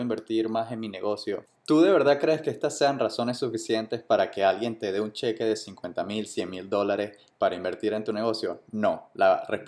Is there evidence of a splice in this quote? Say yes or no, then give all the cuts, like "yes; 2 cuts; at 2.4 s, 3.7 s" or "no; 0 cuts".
no; 0 cuts